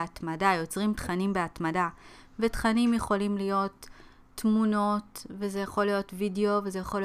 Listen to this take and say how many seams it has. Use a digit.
0